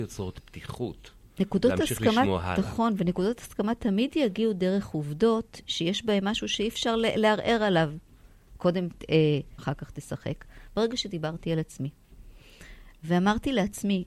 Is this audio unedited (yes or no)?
no